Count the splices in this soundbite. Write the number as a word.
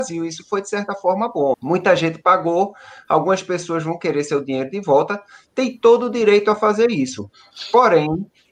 one